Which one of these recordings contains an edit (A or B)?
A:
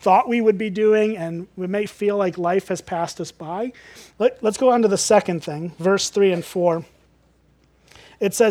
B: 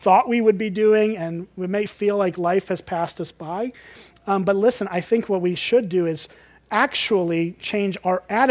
A